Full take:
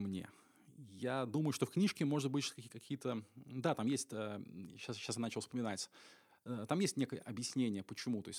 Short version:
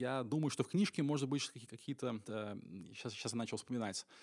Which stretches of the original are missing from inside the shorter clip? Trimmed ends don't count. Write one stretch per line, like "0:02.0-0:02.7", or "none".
0:03.3-0:04.1